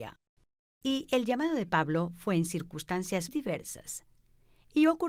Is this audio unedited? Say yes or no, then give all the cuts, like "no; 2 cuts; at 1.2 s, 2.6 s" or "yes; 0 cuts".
no; 1 cut; at 3.3 s